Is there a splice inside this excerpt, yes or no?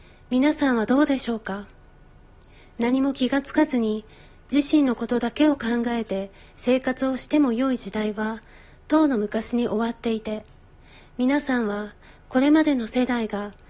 no